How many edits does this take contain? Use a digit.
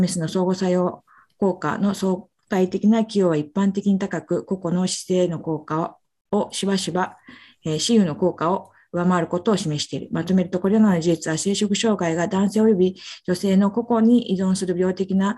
0